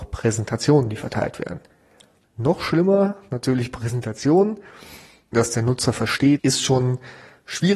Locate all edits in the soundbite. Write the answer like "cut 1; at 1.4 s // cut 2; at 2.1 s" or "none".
cut 1; at 2.2 s // cut 2; at 5.3 s // cut 3; at 6.4 s